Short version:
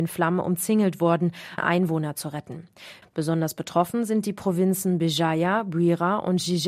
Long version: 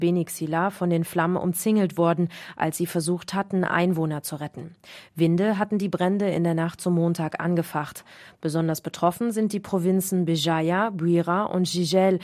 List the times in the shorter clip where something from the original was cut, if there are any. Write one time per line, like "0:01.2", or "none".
0:01.6
0:03.0